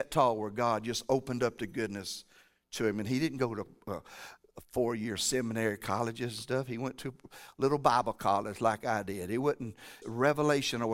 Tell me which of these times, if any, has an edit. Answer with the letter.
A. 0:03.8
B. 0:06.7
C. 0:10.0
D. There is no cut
C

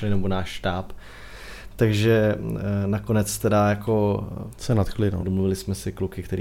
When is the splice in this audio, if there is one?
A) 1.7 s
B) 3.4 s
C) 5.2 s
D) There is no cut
C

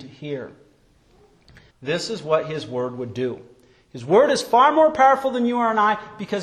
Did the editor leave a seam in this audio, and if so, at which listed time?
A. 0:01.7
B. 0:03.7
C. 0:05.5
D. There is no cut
A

